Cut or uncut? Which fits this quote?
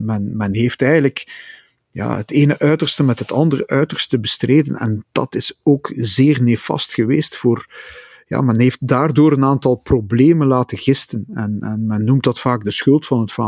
uncut